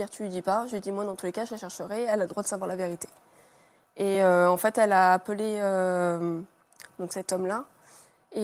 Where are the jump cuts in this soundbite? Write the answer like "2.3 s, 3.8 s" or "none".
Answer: none